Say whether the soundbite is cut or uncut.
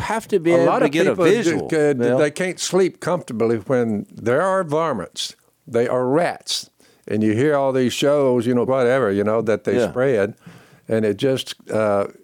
cut